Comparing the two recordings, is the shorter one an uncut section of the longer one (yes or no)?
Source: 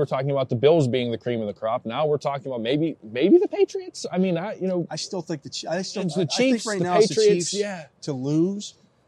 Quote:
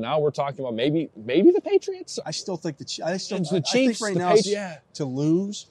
no